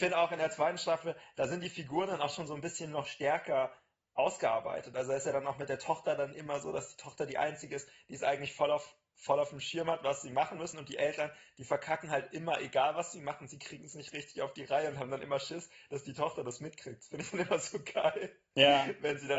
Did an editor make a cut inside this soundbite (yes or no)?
no